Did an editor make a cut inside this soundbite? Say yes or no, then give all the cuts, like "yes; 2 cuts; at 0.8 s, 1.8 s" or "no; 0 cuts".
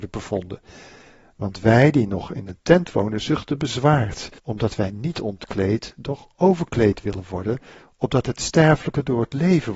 yes; 1 cut; at 4.4 s